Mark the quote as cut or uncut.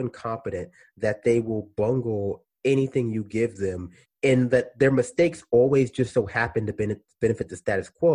uncut